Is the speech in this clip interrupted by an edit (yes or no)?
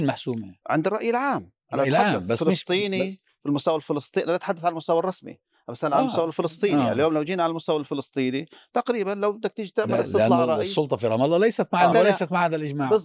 yes